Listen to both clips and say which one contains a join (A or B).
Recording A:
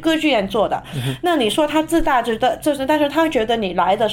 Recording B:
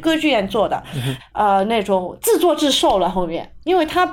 B